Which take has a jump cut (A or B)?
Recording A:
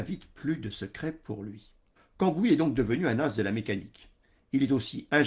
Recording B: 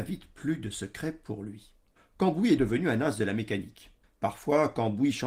B